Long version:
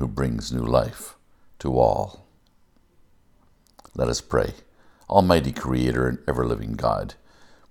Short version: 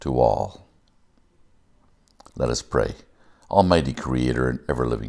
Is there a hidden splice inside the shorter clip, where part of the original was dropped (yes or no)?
no